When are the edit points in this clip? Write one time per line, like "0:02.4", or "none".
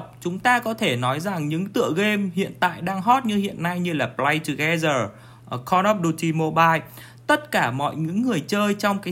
0:05.4